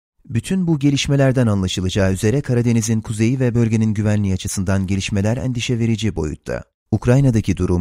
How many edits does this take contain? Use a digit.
1